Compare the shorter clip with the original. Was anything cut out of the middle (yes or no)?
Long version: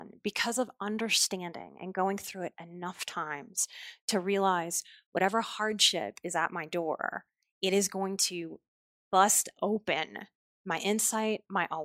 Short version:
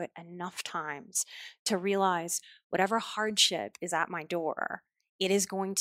no